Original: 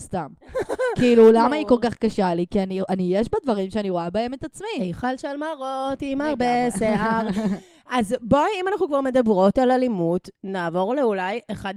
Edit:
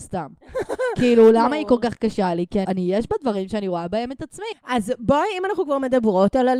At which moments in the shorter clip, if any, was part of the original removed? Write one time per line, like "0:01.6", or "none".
0:02.7
0:04.5